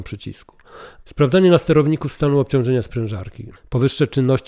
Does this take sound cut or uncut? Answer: cut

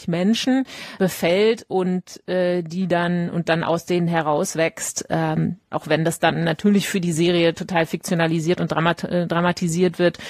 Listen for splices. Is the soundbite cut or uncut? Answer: cut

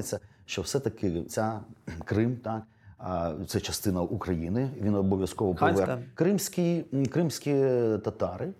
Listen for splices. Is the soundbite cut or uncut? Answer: cut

